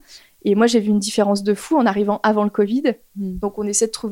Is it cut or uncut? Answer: cut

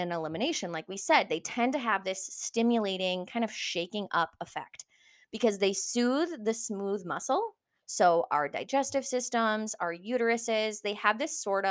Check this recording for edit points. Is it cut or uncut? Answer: uncut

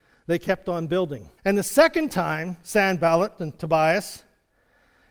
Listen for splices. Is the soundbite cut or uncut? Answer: cut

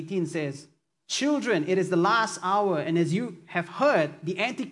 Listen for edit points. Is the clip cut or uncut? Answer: uncut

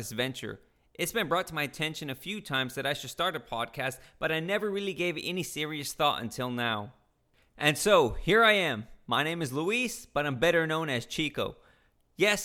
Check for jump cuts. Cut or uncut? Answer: uncut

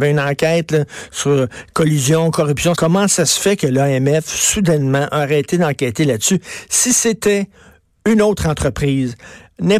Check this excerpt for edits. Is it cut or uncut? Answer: cut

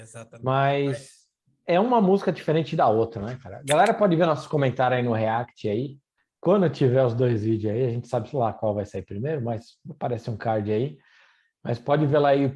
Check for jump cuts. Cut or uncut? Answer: uncut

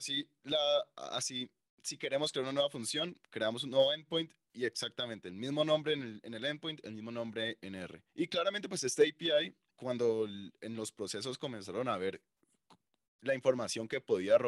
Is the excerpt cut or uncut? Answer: cut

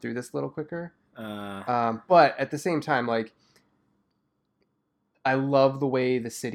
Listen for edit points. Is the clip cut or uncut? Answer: uncut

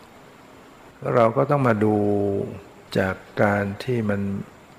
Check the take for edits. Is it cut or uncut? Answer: cut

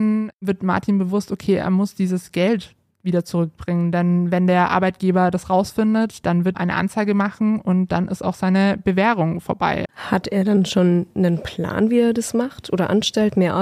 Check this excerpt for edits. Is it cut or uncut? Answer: cut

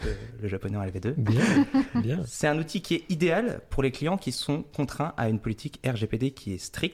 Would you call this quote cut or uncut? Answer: uncut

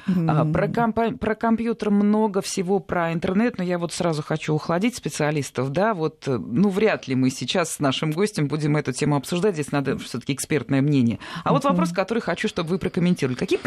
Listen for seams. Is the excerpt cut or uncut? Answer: uncut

